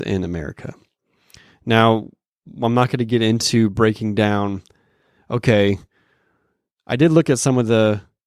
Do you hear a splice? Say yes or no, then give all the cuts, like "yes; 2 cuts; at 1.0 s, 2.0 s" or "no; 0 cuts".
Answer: no; 0 cuts